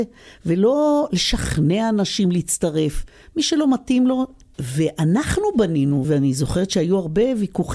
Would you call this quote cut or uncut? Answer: cut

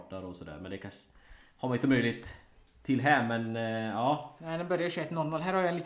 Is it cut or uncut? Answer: uncut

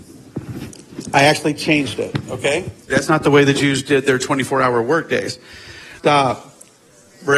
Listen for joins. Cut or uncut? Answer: cut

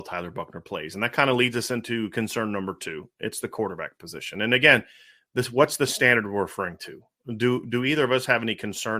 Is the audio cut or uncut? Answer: uncut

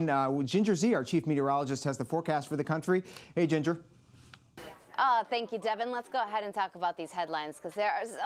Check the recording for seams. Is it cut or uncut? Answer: uncut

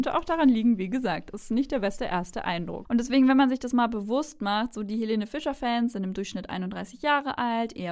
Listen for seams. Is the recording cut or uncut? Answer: cut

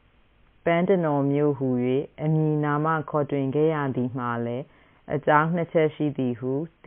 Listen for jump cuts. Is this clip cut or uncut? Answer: uncut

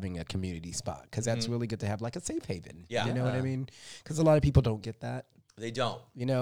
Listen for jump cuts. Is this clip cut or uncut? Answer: uncut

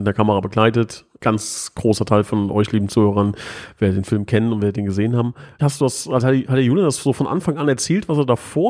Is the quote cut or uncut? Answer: cut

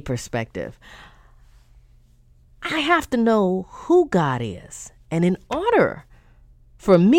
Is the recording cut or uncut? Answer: uncut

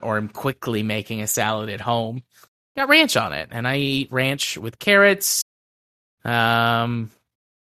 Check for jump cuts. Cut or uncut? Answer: uncut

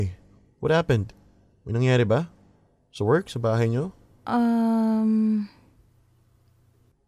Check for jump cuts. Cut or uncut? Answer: uncut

